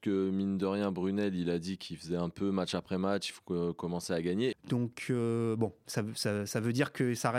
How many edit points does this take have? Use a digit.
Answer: 1